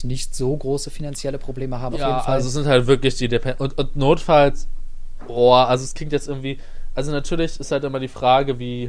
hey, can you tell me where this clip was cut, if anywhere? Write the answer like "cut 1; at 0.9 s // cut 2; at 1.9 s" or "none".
cut 1; at 1.9 s